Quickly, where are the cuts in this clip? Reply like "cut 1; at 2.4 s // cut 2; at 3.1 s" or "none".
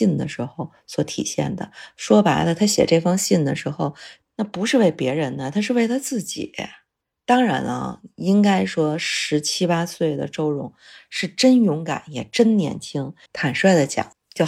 cut 1; at 4.2 s // cut 2; at 13.3 s